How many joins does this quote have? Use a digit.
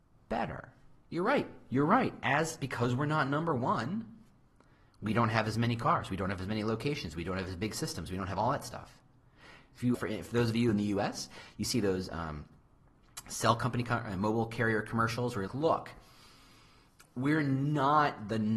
2